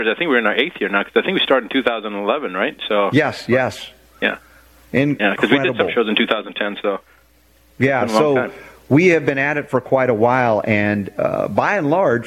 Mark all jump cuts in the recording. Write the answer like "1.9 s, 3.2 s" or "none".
none